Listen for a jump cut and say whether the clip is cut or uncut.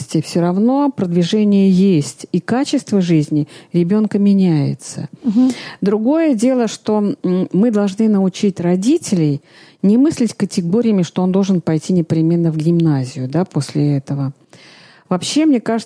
uncut